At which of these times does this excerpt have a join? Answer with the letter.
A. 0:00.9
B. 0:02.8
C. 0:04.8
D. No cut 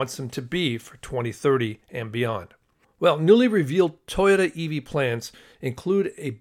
D